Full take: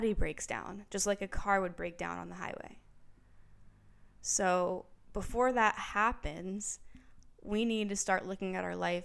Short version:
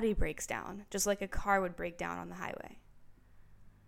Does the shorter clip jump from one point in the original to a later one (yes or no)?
no